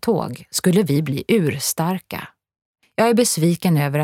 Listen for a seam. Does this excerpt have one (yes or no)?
yes